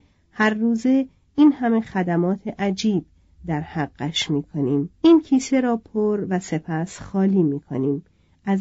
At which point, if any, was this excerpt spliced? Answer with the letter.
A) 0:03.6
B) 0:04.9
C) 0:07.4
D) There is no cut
B